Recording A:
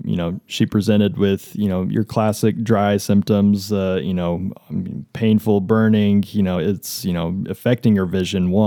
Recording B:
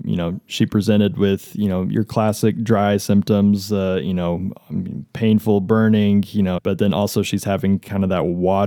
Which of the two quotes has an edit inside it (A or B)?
B